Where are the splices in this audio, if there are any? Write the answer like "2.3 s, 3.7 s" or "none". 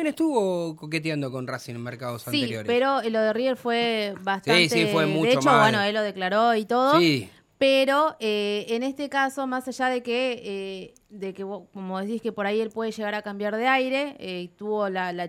none